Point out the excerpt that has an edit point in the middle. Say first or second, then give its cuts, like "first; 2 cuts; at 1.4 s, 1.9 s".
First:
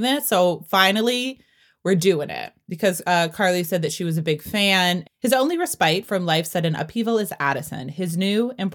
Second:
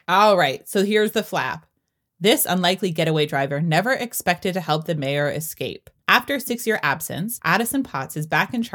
first; 1 cut; at 5.0 s